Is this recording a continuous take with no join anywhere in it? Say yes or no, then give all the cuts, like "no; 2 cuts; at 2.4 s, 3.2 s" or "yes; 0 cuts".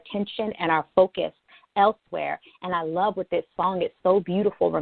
yes; 0 cuts